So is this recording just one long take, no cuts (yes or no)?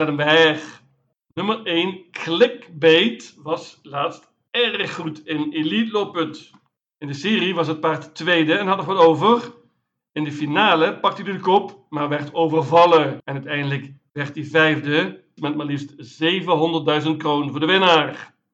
no